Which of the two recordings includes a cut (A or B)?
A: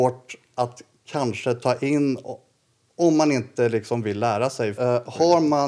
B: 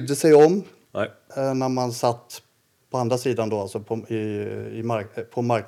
A